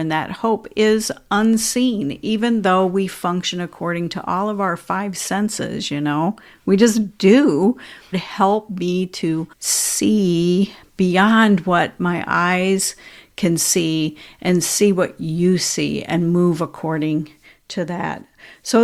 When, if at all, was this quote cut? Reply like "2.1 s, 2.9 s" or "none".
8.1 s, 9.5 s